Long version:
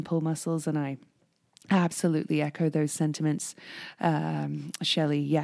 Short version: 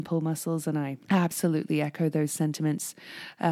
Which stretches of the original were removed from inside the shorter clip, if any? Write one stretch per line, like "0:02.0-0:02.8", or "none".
0:01.0-0:01.6